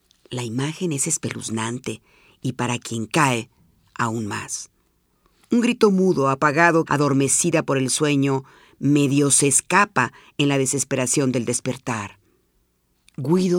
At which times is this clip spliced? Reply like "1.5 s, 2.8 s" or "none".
6.8 s